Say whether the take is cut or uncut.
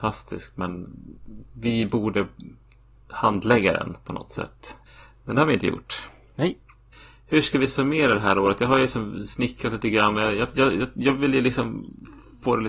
uncut